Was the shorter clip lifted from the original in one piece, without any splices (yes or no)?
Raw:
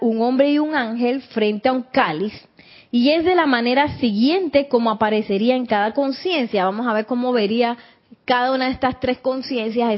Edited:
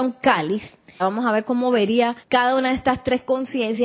no